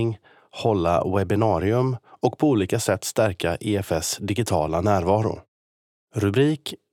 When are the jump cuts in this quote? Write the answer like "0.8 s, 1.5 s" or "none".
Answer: 6.0 s